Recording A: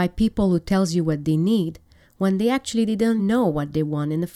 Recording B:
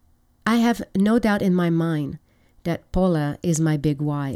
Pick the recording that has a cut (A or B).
A